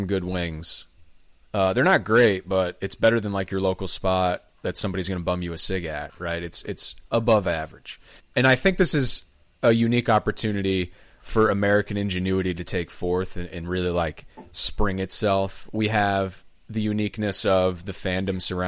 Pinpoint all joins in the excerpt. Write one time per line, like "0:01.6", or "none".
0:08.2